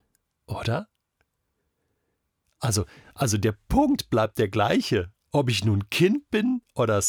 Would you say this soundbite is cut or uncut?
uncut